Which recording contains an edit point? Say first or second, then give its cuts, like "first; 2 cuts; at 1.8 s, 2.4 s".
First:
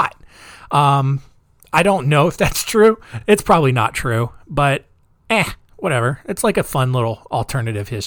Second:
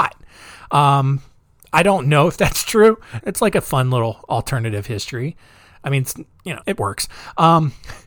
second; 2 cuts; at 3.2 s, 6.6 s